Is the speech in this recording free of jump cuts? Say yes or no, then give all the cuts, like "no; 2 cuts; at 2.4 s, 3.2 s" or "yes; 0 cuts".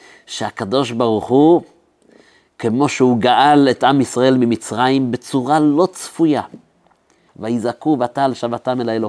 no; 1 cut; at 7.3 s